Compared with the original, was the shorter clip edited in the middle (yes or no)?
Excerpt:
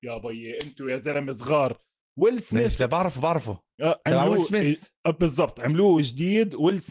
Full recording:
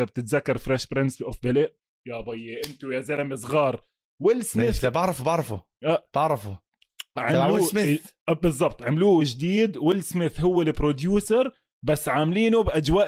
yes